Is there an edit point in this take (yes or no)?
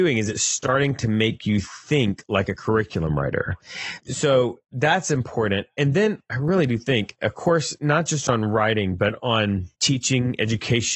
yes